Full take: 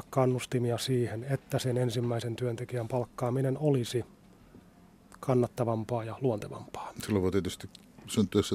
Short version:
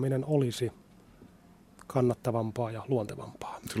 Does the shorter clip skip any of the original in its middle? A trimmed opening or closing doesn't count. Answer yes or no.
no